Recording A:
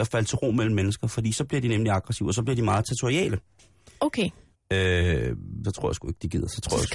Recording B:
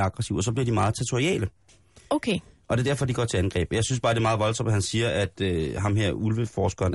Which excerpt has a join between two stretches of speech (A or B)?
A